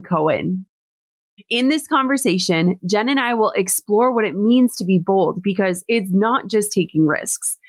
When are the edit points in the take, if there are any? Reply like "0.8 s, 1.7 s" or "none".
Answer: 1.4 s